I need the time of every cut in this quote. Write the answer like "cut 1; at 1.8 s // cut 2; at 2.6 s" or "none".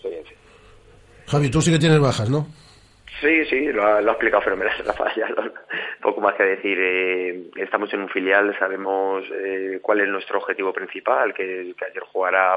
none